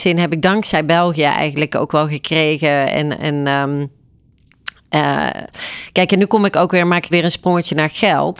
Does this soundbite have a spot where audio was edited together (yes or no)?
yes